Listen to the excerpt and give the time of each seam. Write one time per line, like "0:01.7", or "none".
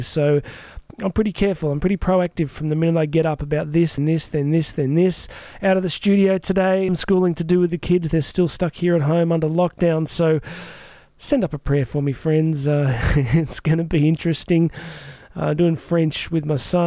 0:04.0